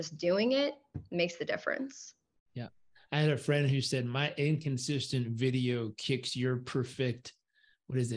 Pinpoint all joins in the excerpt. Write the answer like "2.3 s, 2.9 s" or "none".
none